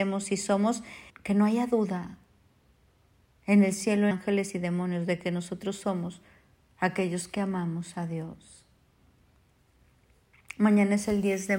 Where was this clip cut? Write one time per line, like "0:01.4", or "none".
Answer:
0:01.1
0:04.1